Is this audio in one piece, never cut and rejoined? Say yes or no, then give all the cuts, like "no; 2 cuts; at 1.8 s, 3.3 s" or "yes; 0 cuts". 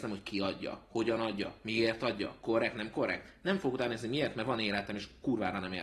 yes; 0 cuts